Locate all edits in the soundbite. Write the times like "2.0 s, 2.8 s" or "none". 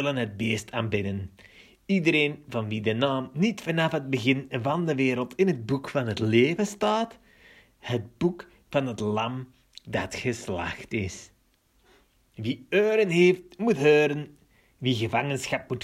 none